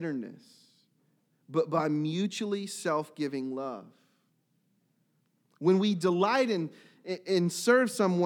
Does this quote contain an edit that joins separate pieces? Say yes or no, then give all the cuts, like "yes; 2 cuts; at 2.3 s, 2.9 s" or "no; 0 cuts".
no; 0 cuts